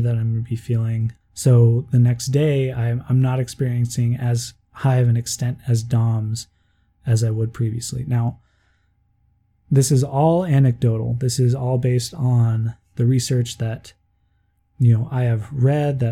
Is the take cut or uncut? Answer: uncut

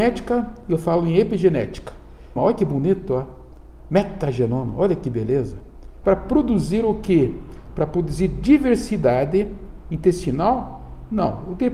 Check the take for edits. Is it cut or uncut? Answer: cut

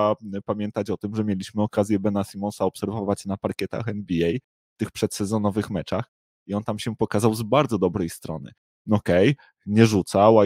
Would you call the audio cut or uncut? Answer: uncut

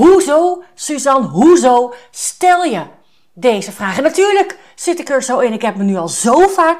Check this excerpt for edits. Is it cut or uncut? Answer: uncut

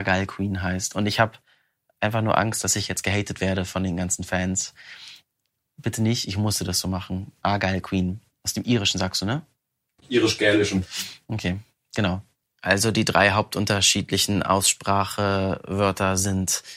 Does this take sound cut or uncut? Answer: uncut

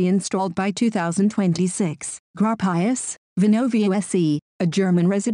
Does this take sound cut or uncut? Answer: cut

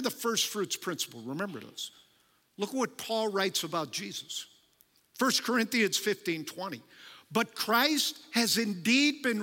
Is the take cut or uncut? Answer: uncut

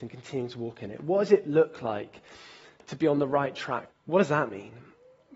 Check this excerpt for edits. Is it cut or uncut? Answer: cut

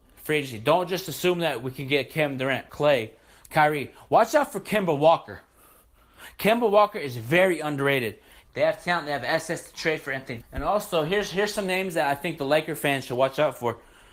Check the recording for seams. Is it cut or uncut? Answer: cut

